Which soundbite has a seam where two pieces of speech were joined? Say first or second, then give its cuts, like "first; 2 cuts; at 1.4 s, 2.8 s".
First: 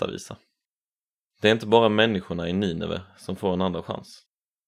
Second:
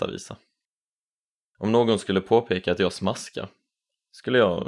first; 1 cut; at 1.3 s